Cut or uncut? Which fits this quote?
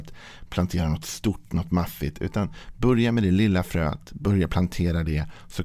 uncut